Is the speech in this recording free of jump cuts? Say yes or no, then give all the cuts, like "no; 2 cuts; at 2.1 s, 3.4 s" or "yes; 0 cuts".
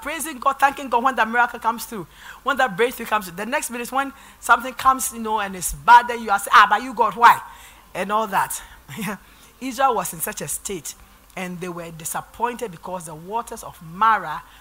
yes; 0 cuts